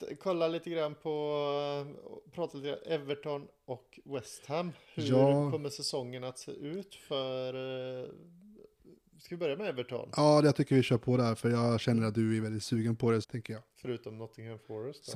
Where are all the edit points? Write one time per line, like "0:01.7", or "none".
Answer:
0:13.2